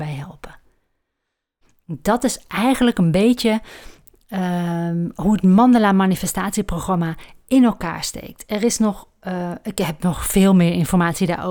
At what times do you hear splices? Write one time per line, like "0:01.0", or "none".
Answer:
none